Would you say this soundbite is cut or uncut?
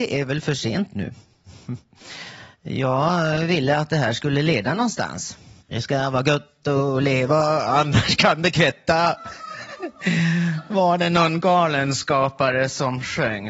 cut